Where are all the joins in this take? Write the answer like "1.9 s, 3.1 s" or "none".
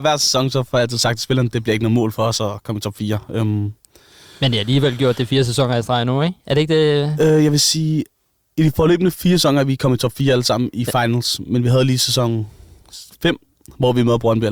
none